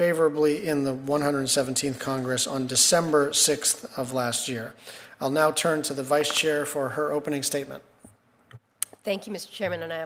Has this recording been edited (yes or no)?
no